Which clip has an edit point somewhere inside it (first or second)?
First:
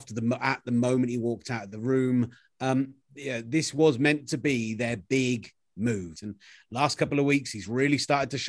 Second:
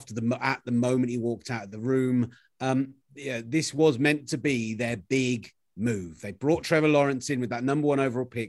first